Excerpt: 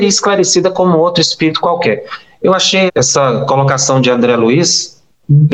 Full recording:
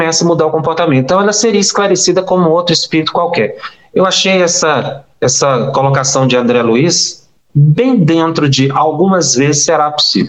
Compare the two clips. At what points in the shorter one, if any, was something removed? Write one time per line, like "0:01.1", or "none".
0:02.9